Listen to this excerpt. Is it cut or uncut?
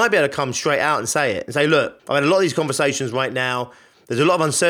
cut